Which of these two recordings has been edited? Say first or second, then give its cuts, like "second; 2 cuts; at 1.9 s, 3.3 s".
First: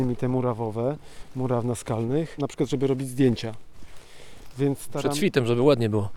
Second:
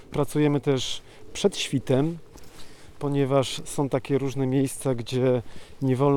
first; 1 cut; at 2.4 s